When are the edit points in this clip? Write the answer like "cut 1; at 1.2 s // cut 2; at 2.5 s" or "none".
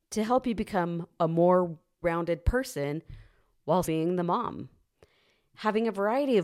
cut 1; at 2.0 s // cut 2; at 3.8 s